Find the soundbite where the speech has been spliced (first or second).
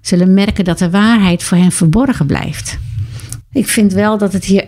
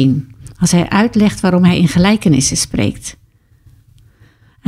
first